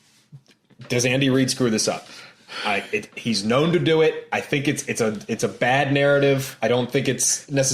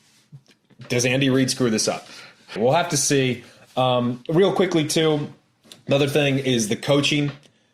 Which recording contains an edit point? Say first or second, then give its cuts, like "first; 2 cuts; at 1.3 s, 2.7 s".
second; 1 cut; at 2.6 s